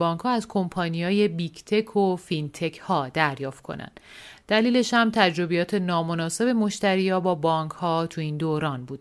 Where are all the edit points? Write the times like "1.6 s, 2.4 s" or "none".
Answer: none